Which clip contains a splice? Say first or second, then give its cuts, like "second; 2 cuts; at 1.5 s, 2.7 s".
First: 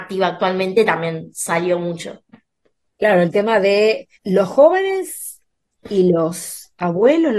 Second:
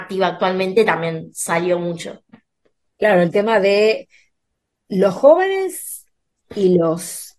first; 1 cut; at 4.2 s